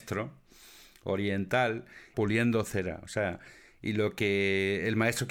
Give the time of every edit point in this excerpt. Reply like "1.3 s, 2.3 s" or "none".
2.1 s